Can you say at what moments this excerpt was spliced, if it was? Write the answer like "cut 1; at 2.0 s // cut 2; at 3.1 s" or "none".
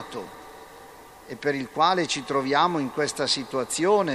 none